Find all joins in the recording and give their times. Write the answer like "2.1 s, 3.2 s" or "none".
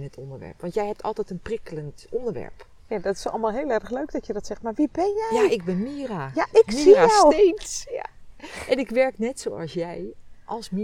none

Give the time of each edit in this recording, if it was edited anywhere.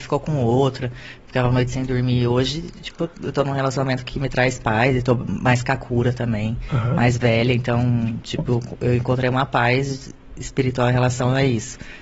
none

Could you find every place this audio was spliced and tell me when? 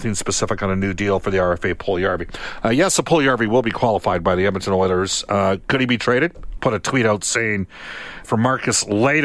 6.6 s, 8.2 s

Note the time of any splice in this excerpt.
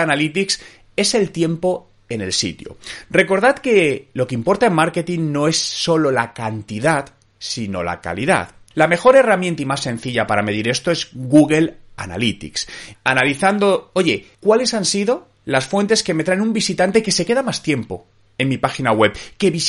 8.7 s, 12.9 s, 14.3 s

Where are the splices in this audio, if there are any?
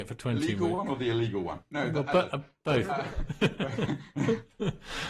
none

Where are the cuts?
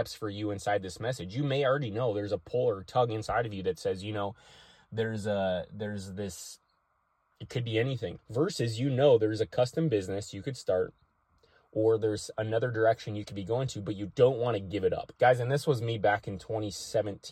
8.2 s, 15.2 s

